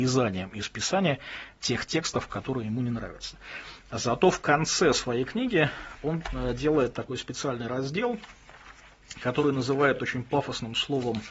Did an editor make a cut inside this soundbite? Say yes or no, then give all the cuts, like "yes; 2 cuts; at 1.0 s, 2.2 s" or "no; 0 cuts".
no; 0 cuts